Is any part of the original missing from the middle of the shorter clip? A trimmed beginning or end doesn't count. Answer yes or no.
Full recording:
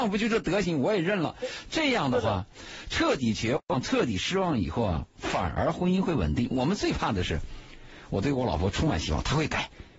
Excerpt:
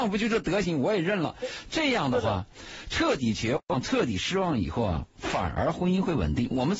no